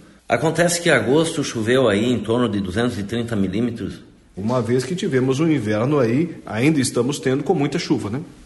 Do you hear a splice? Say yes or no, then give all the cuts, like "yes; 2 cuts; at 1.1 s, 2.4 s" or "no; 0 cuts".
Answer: yes; 1 cut; at 4.4 s